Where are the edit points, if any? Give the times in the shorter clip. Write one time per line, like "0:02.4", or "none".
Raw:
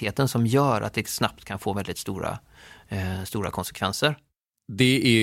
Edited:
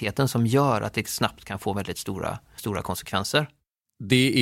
0:02.6